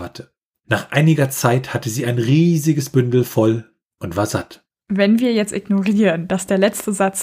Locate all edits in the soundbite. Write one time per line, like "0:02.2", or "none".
0:04.7